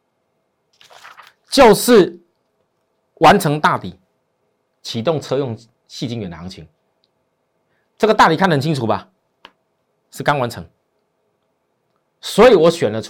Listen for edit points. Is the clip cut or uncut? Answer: uncut